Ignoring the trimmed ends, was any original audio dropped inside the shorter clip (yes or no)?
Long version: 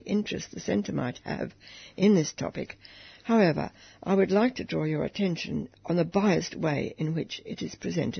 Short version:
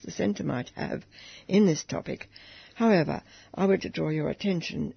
yes